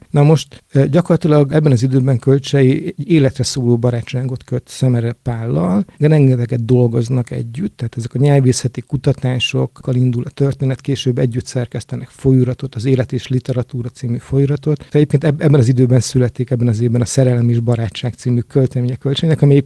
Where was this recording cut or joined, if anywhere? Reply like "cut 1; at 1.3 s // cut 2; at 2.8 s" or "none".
cut 1; at 5.9 s // cut 2; at 14.9 s